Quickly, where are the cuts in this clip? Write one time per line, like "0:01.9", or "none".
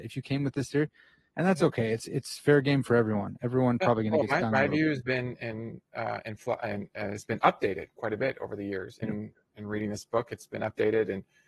0:09.0